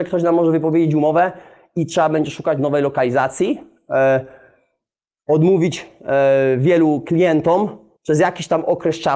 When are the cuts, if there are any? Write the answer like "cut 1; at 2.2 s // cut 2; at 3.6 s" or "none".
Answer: cut 1; at 8.0 s